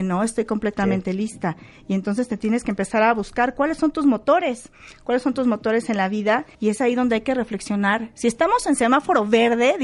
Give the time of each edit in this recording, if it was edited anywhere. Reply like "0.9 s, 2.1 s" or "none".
6.5 s